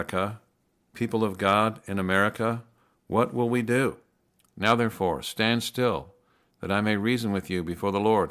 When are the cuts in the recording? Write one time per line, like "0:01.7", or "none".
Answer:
0:04.4